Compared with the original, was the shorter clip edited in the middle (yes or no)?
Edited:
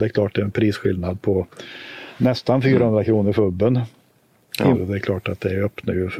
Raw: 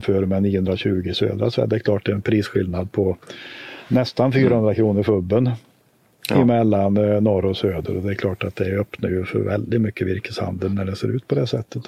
yes